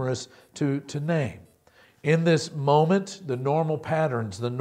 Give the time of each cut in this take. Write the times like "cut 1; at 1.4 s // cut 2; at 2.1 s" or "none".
cut 1; at 1.8 s